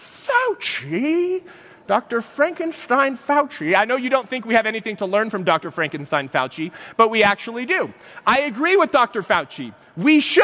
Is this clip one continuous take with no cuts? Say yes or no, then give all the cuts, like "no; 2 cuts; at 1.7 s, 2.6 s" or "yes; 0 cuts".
yes; 0 cuts